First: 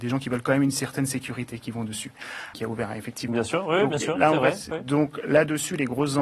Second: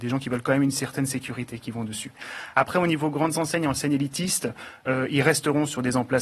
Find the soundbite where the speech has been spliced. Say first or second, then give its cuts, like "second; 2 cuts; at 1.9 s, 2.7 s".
first; 1 cut; at 2.5 s